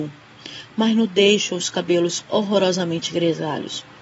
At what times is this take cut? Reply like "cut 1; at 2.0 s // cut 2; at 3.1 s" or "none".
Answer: none